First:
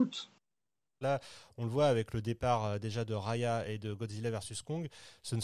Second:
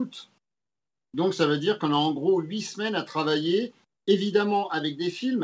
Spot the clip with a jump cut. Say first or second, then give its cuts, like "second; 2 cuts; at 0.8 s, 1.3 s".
first; 1 cut; at 1.0 s